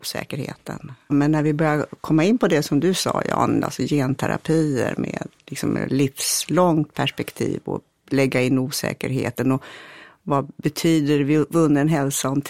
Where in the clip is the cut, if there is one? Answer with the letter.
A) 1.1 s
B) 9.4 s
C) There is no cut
A